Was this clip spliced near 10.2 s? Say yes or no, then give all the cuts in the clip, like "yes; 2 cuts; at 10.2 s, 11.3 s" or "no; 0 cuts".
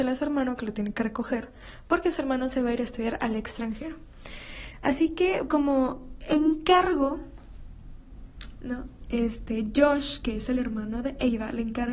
no; 1 cut; at 5.5 s